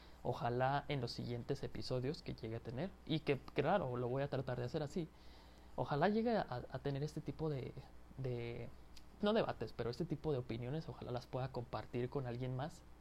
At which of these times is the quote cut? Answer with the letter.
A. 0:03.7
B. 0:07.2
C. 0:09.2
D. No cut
C